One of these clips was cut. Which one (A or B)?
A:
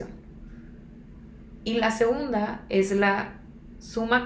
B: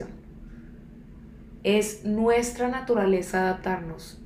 B